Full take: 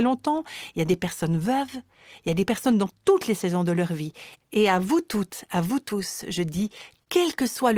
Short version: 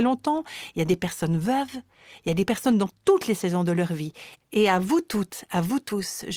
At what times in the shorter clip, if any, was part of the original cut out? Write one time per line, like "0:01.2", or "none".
none